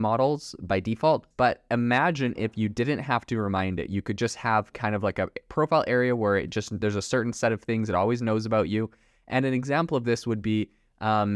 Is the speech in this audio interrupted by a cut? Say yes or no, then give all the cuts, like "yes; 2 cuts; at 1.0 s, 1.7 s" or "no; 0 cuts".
yes; 1 cut; at 1.3 s